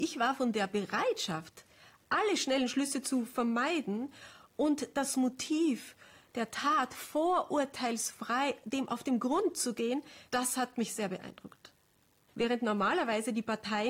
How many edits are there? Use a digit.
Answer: 2